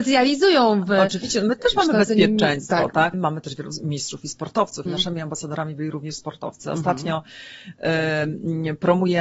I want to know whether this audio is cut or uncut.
cut